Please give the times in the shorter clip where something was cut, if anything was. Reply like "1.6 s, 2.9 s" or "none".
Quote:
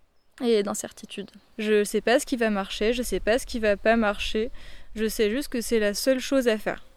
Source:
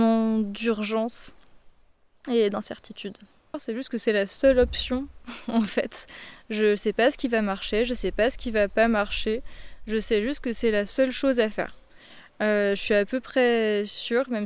1.5 s